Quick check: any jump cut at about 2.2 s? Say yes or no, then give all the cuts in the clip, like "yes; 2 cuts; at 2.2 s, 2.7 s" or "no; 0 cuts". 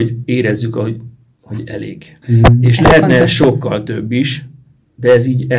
yes; 1 cut; at 2.2 s